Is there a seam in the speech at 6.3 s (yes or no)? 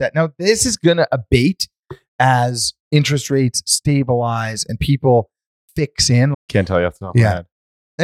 yes